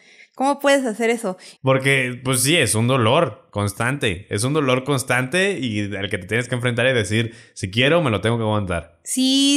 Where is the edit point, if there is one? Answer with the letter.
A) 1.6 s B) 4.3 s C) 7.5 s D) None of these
A